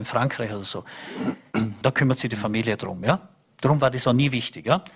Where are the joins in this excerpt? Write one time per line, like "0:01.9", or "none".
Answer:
0:01.8